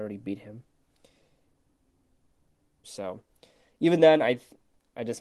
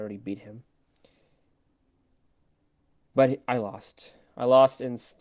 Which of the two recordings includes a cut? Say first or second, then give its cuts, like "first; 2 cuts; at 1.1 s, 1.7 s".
first; 1 cut; at 2.8 s